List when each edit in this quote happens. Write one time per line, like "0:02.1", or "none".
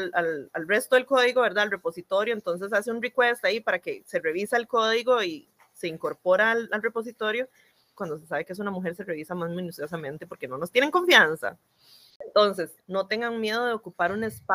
0:08.0
0:12.8